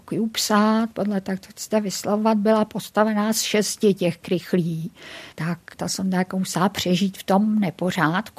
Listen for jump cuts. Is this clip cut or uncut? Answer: cut